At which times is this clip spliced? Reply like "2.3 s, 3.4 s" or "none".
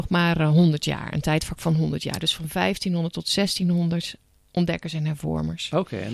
none